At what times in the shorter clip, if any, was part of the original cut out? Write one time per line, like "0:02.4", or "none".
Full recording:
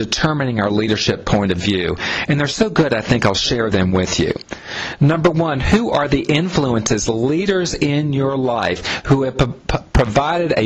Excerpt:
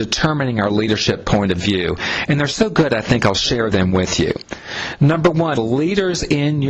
0:05.5

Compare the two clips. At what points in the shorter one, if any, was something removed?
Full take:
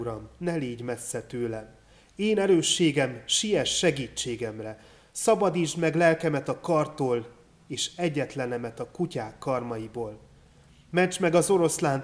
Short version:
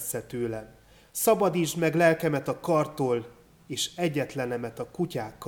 0:01.0

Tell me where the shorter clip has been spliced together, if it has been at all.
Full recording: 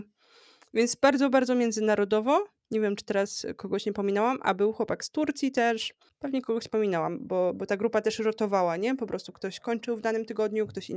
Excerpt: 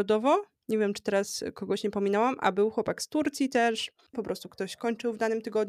0:04.1

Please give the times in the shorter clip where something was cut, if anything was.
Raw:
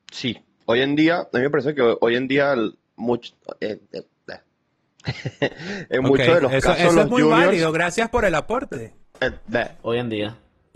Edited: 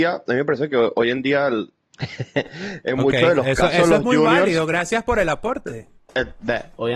0:01.9

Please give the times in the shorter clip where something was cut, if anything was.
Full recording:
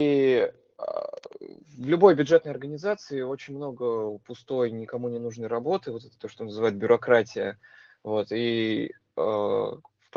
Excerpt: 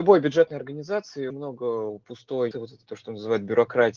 0:01.3
0:02.5

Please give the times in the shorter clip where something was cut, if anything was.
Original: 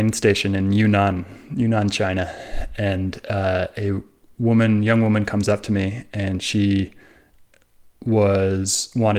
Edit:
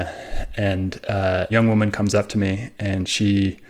0:01.5

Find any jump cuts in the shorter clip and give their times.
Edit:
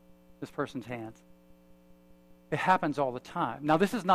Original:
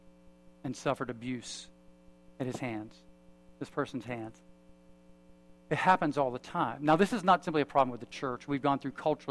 none

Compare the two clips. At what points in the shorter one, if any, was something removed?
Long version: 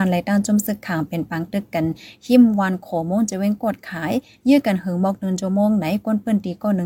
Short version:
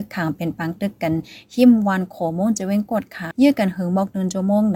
0:03.3

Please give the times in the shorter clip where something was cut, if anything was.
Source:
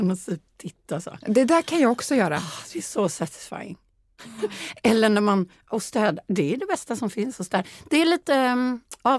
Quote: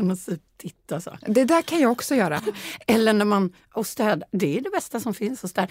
0:02.4

